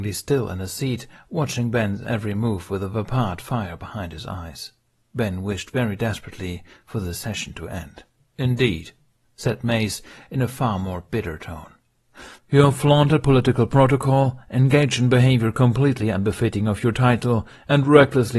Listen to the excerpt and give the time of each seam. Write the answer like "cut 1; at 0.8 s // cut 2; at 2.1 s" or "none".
cut 1; at 8.3 s // cut 2; at 12.4 s